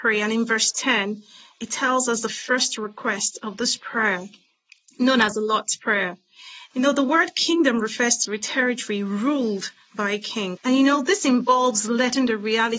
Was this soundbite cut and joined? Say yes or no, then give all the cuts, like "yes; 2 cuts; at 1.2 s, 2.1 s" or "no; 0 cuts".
yes; 2 cuts; at 6.7 s, 10.6 s